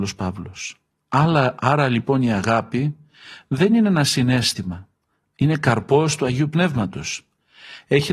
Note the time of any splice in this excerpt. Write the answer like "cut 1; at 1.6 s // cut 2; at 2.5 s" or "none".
none